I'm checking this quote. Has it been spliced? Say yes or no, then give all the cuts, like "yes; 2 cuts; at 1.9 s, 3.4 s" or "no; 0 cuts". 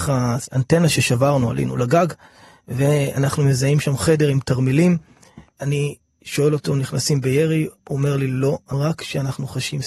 yes; 2 cuts; at 5.5 s, 7.8 s